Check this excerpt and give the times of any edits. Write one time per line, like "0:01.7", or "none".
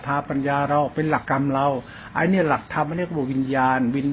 0:01.3